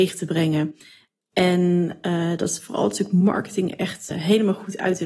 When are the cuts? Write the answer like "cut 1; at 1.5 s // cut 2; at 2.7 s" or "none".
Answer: cut 1; at 4.1 s